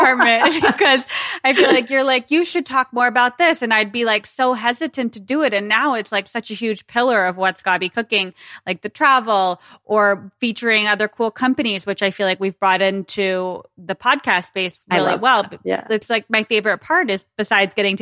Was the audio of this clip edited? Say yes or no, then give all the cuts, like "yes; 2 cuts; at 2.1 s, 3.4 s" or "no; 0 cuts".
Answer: no; 0 cuts